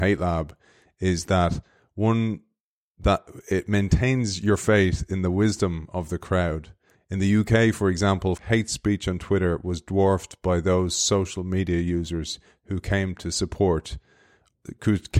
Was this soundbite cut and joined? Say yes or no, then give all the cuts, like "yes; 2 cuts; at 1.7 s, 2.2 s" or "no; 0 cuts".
yes; 2 cuts; at 6.9 s, 8.4 s